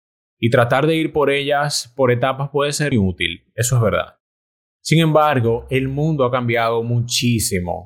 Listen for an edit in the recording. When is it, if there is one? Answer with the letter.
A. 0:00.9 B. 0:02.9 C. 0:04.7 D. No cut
B